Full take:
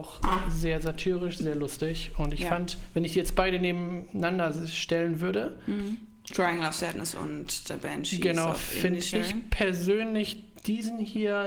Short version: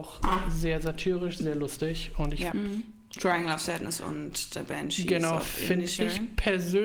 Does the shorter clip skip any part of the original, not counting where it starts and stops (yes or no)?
yes